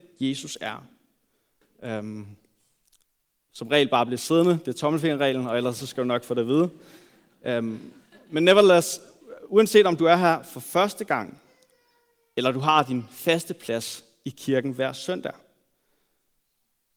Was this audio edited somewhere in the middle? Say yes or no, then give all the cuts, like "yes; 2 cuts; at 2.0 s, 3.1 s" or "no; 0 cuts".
yes; 1 cut; at 1.6 s